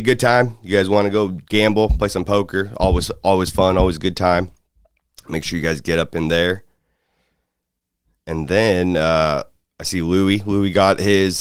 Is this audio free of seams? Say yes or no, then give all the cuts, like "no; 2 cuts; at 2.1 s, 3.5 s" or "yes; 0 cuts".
yes; 0 cuts